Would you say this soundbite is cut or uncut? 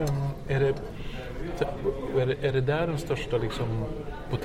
cut